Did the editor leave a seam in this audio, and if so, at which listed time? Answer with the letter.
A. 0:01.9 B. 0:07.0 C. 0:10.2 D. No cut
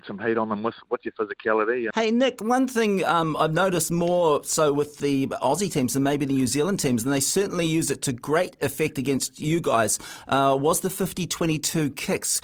A